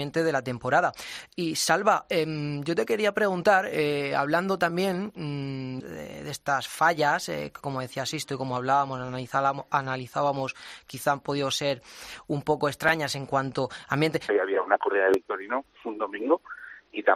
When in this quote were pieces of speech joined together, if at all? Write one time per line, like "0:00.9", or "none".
0:05.8
0:14.3